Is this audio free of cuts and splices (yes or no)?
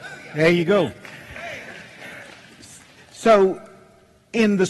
yes